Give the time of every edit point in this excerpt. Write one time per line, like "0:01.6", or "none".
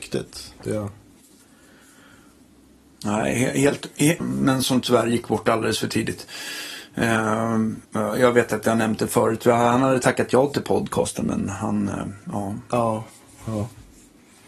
0:04.2
0:07.8

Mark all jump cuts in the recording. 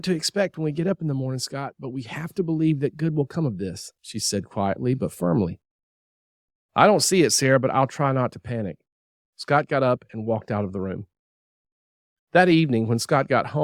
0:09.2

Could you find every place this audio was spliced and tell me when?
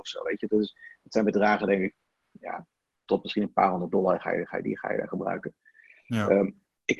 none

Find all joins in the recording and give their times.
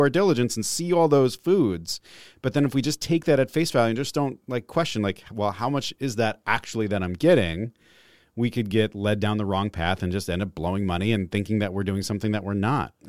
none

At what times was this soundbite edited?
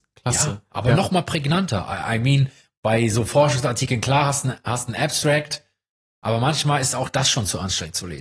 none

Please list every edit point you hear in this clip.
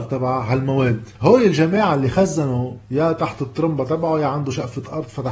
0:01.1
0:02.8

